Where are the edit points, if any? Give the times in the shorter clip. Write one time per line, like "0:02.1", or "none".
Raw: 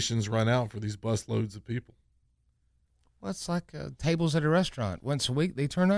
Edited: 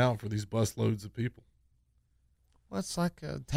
none